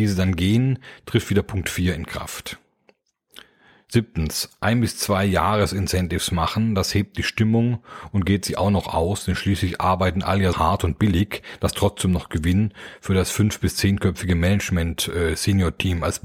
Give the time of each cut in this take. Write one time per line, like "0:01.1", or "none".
0:10.5